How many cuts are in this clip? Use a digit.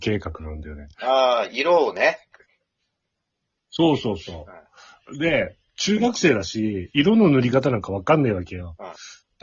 0